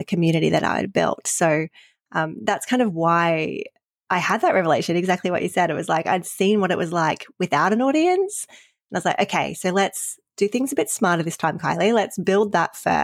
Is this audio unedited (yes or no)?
yes